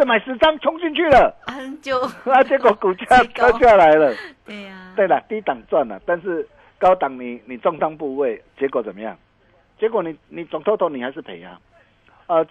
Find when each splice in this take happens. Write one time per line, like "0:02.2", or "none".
none